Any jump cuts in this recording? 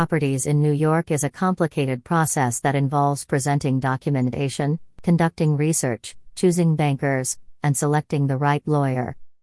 yes; 1 cut; at 6.3 s

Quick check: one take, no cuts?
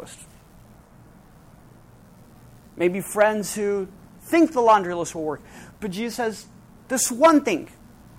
yes; 0 cuts

